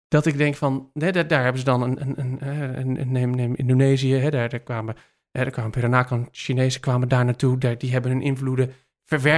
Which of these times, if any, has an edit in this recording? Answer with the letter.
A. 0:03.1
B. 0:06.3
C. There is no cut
C